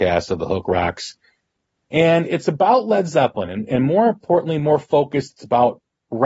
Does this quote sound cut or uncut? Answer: uncut